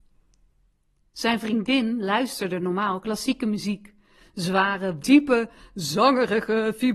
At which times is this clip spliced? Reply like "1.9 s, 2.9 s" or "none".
5.0 s